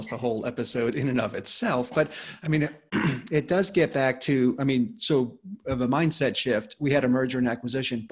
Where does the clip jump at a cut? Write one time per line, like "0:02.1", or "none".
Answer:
none